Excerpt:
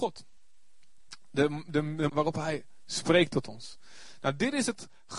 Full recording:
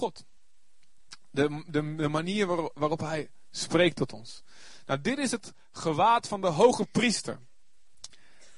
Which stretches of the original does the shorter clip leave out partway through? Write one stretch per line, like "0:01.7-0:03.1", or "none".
0:02.1-0:02.7